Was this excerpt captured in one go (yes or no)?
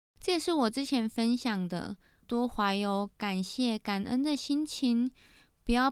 no